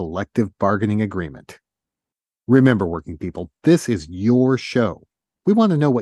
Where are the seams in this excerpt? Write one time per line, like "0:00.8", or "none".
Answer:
none